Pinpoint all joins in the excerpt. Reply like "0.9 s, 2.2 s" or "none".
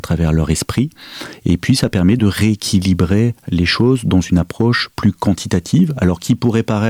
2.2 s